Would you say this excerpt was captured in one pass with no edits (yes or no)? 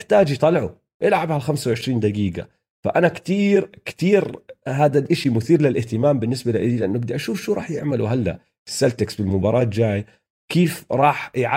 yes